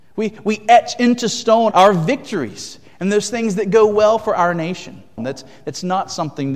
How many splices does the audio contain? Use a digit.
2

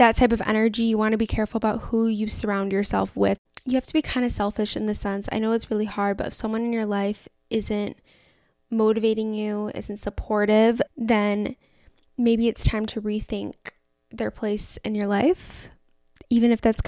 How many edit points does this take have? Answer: 2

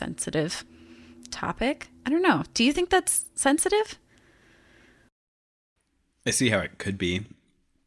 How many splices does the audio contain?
0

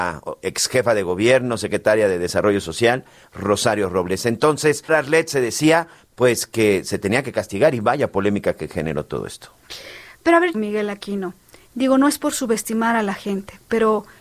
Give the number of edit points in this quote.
2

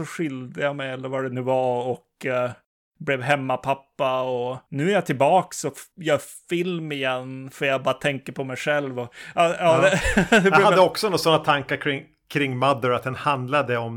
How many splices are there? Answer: 0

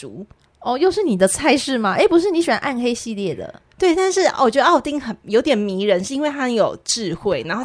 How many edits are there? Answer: 0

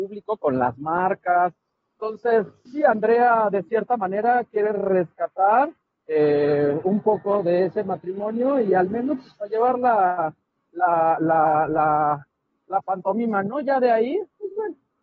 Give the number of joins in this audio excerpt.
1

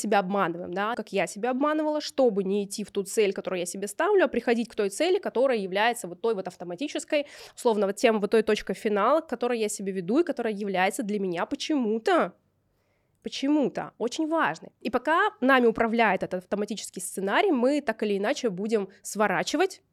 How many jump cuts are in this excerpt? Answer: 1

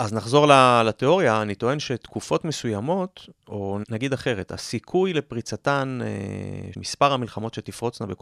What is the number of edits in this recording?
2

